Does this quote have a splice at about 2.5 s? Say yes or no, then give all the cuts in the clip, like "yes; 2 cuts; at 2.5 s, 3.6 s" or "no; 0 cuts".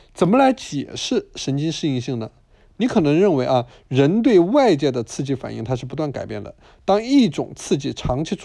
no; 0 cuts